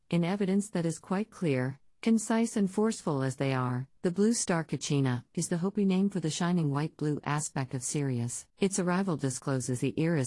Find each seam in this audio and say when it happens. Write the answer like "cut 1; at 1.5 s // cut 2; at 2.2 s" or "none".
cut 1; at 4.0 s // cut 2; at 5.3 s // cut 3; at 8.5 s